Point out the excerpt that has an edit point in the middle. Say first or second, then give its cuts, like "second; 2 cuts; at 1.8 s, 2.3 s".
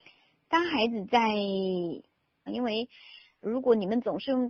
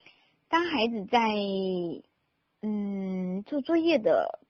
first; 1 cut; at 2.5 s